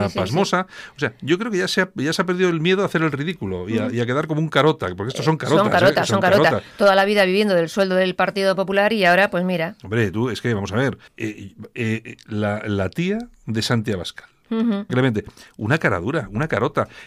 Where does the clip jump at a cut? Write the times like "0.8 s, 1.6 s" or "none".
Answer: 11.1 s, 14.9 s